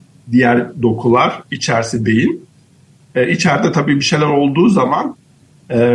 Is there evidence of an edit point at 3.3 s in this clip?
no; 0 cuts

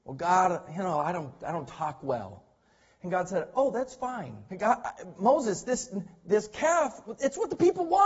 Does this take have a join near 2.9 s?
no; 1 cut; at 4.5 s

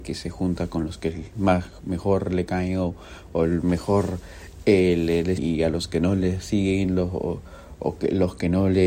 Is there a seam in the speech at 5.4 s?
yes; 1 cut; at 5.4 s

